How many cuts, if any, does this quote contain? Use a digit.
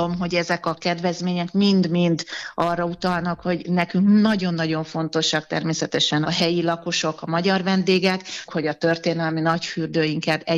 2